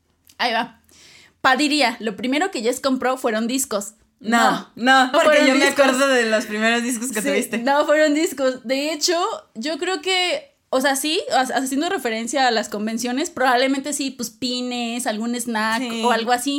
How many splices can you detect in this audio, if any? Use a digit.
1